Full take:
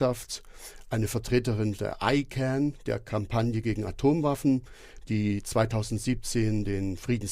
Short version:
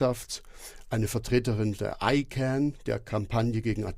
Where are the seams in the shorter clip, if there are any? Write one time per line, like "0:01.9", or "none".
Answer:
none